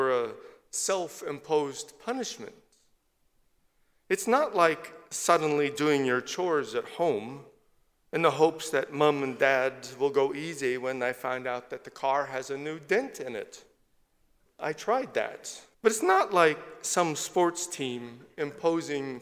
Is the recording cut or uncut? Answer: cut